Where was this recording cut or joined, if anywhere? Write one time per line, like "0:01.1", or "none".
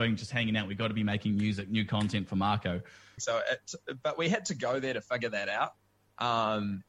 0:03.2